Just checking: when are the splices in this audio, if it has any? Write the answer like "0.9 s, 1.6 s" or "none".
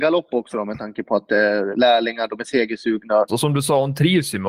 1.7 s, 3.3 s